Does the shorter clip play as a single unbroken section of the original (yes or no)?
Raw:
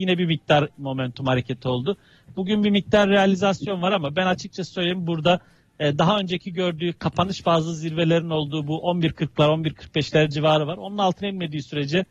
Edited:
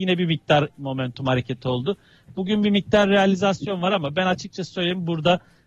yes